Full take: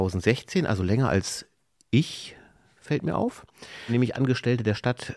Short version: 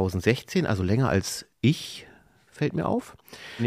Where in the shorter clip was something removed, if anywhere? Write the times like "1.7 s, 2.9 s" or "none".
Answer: 1.5 s